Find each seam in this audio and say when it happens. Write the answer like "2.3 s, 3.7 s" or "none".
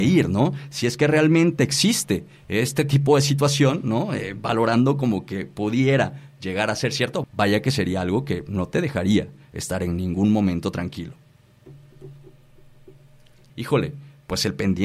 7.2 s, 13.5 s